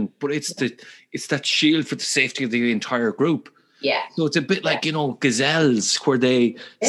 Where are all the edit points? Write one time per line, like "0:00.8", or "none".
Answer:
none